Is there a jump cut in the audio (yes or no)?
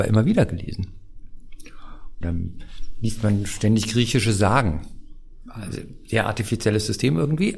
yes